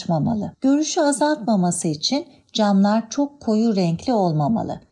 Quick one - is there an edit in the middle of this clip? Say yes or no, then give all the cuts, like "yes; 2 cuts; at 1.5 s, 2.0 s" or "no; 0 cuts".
no; 0 cuts